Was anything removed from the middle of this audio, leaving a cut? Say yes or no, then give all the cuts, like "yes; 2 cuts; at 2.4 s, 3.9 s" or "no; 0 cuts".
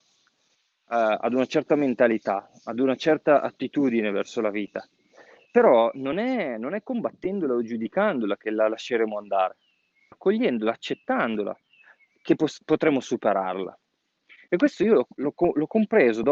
yes; 1 cut; at 10.1 s